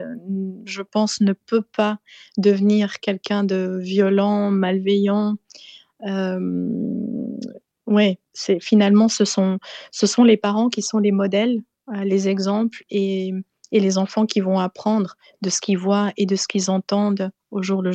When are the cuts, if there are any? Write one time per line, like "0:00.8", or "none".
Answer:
none